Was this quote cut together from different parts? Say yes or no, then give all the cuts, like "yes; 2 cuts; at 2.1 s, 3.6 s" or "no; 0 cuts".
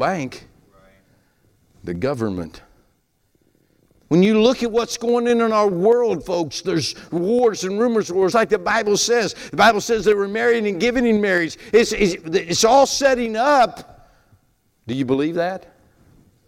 yes; 1 cut; at 8.3 s